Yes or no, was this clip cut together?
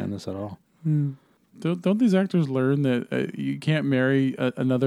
no